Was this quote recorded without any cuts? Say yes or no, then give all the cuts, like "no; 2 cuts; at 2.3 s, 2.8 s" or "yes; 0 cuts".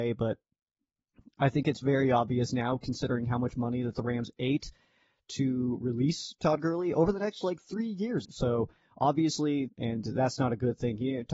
no; 2 cuts; at 8.2 s, 9.7 s